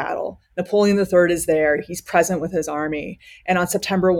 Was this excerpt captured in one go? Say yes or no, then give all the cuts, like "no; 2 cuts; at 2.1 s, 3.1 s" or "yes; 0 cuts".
yes; 0 cuts